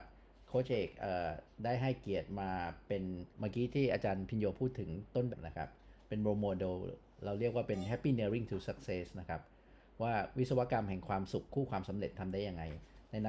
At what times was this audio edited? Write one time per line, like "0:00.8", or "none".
0:03.3
0:05.3